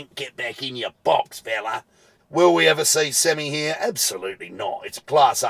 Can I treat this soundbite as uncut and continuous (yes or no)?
no